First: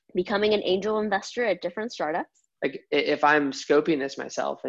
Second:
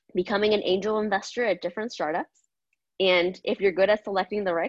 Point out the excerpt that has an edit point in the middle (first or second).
first